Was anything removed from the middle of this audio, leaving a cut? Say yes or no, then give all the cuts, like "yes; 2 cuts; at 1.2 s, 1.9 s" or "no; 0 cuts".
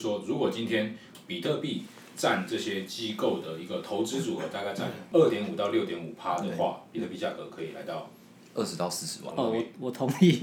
yes; 1 cut; at 9.3 s